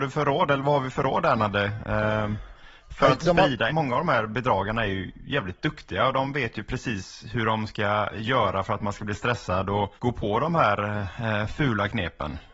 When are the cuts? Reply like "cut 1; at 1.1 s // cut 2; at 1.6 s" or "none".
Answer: cut 1; at 3.7 s // cut 2; at 10.0 s